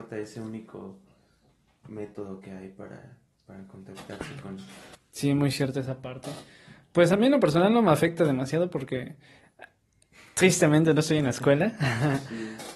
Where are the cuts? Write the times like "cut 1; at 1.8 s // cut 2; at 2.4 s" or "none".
cut 1; at 4.9 s